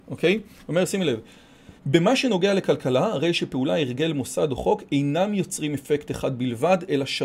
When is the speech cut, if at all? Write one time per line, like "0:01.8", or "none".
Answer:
0:01.8